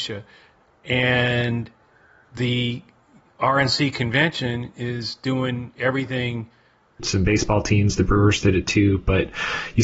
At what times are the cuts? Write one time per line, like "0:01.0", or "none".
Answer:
0:07.0